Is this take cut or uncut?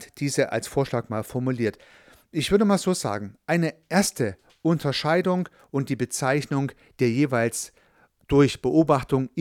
uncut